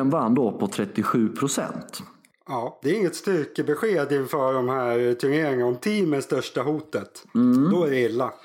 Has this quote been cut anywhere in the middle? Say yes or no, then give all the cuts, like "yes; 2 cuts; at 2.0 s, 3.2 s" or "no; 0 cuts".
no; 0 cuts